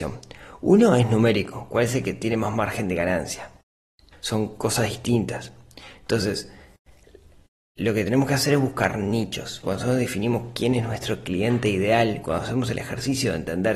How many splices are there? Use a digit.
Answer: 2